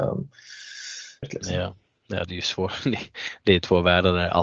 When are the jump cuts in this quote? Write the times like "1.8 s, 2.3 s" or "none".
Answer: 1.2 s